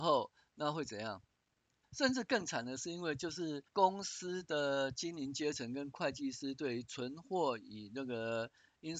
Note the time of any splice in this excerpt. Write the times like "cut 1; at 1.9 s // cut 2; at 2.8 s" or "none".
cut 1; at 1.8 s // cut 2; at 3.7 s